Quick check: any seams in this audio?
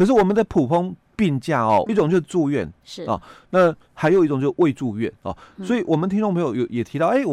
yes; 1 cut; at 1.9 s

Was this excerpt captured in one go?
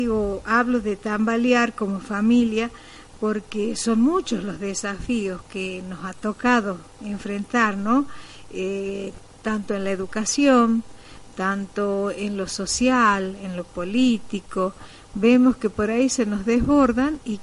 yes; 0 cuts

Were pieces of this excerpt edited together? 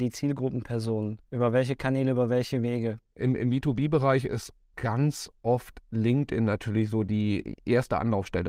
no; 0 cuts

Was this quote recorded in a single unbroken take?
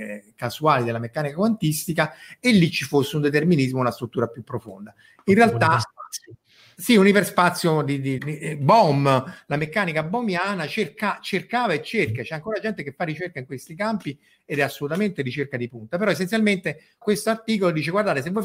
no; 2 cuts; at 8.2 s, 17.0 s

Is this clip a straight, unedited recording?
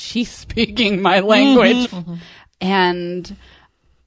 no; 1 cut; at 1.8 s

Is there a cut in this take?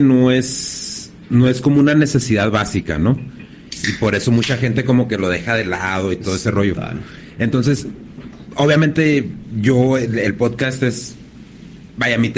no; 0 cuts

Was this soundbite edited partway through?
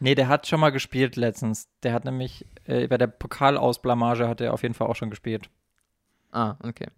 no; 0 cuts

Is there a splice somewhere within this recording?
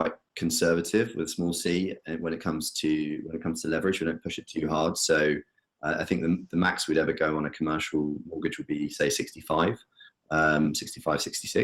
no; 0 cuts

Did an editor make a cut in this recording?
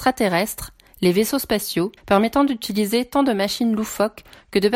yes; 1 cut; at 2.0 s

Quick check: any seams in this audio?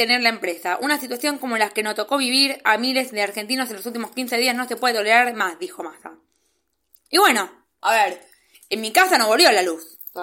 yes; 1 cut; at 7.8 s

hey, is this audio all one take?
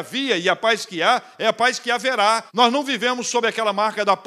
no; 1 cut; at 2.5 s

